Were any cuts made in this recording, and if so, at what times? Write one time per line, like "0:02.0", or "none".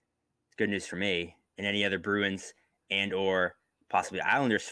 none

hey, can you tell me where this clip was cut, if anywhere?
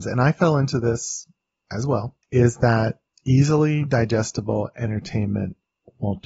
0:02.2

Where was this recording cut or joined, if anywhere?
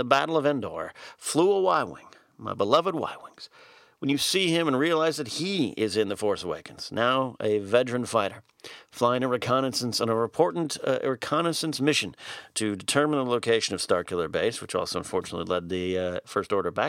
none

